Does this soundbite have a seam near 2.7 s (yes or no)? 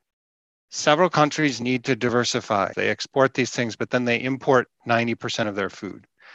yes